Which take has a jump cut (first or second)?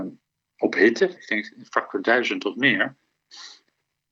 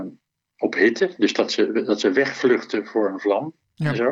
first